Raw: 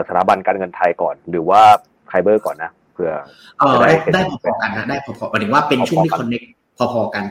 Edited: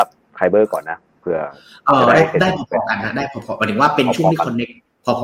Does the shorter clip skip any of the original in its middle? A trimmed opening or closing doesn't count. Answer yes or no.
no